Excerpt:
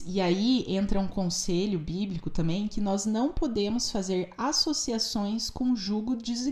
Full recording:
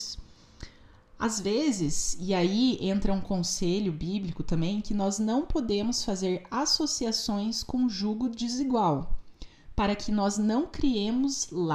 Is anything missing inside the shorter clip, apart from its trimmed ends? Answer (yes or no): no